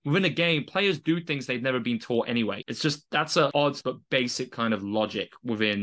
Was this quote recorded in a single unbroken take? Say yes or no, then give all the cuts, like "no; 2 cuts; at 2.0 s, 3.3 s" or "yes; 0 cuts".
no; 2 cuts; at 2.6 s, 3.8 s